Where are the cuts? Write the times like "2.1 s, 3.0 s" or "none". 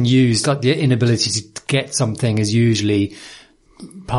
none